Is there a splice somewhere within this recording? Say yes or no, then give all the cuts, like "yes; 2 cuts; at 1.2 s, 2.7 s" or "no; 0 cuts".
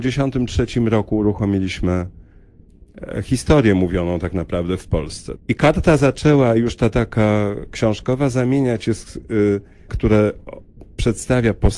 yes; 2 cuts; at 5.4 s, 9.9 s